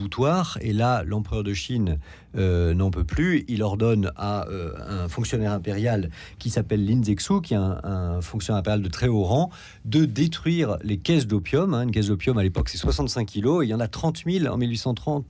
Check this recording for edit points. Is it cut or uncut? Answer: uncut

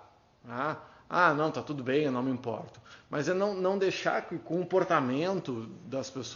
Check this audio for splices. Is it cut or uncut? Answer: uncut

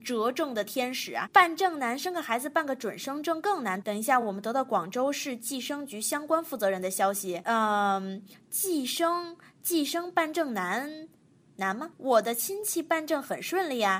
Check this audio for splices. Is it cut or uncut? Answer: uncut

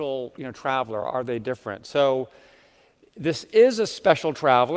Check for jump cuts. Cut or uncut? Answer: uncut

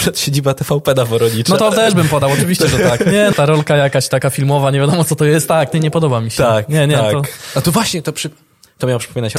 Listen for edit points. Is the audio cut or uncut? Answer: cut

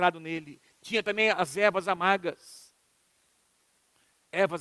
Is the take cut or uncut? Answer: uncut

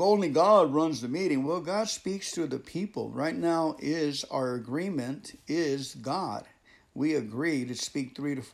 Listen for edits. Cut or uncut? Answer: uncut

